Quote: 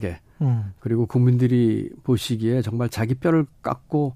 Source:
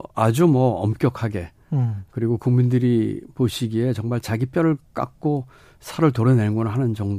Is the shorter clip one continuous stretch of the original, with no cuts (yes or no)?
yes